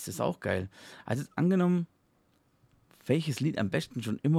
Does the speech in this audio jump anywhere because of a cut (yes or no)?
no